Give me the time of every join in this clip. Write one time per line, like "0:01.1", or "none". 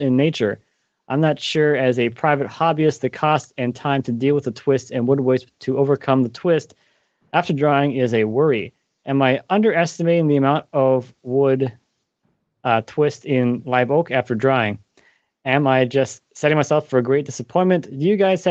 none